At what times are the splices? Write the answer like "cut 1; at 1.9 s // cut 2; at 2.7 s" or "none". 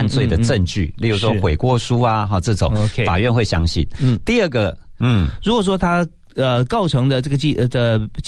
cut 1; at 5.0 s